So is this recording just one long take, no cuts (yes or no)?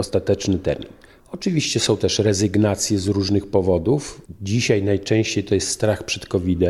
no